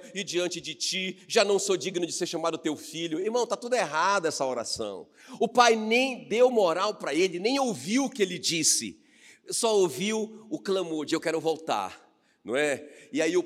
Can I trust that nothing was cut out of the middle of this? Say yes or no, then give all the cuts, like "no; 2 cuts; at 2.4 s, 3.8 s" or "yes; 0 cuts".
yes; 0 cuts